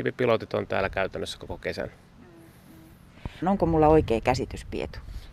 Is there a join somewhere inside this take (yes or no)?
yes